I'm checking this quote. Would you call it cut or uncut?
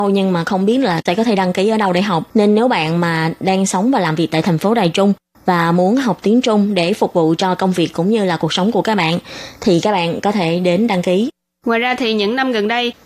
cut